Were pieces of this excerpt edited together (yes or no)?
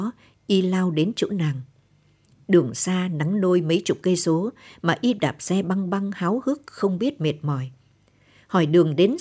no